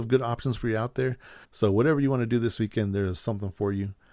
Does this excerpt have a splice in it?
yes; 1 cut; at 1.4 s

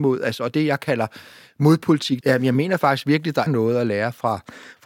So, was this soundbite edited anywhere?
yes; 2 cuts; at 2.2 s, 3.5 s

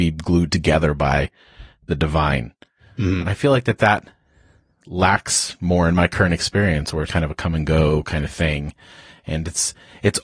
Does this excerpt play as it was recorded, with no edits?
no; 2 cuts; at 3.2 s, 7.1 s

